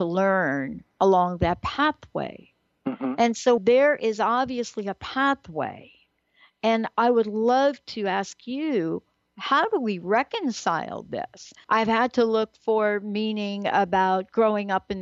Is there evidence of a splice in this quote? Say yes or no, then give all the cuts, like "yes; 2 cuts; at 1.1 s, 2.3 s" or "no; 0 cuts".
yes; 2 cuts; at 3.6 s, 11.6 s